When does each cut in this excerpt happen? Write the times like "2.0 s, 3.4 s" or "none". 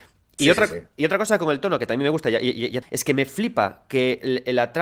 2.8 s